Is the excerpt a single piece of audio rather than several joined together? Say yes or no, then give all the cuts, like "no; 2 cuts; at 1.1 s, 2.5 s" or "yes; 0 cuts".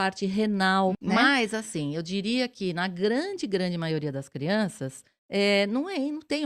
no; 1 cut; at 0.9 s